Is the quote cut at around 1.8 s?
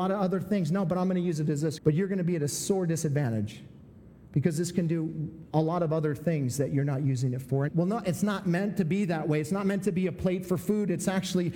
yes; 2 cuts; at 1.8 s, 7.7 s

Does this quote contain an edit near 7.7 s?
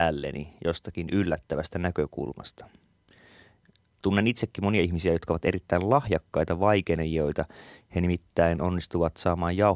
no; 1 cut; at 4.0 s

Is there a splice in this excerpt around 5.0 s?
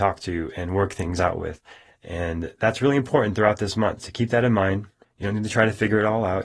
yes; 1 cut; at 5.0 s

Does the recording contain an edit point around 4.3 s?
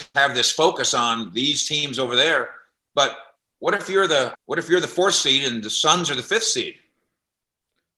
yes; 1 cut; at 4.3 s

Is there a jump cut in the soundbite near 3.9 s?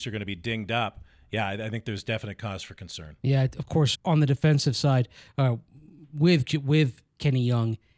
yes; 1 cut; at 3.9 s

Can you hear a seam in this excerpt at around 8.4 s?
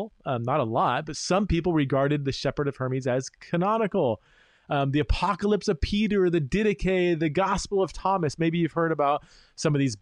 no; 0 cuts

